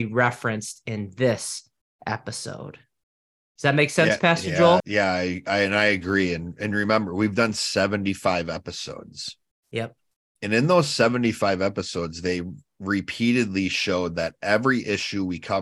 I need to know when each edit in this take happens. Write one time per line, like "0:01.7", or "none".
0:04.8